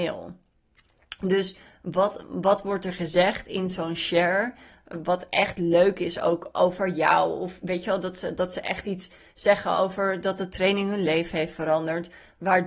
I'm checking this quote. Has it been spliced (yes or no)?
no